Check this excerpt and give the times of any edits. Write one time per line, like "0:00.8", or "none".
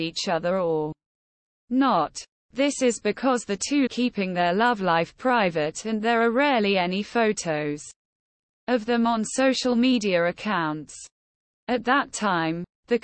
0:03.9
0:11.5